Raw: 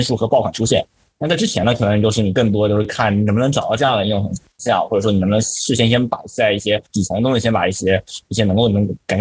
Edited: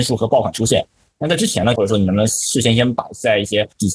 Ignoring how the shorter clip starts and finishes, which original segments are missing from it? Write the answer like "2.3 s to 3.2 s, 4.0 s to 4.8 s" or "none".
1.8 s to 4.9 s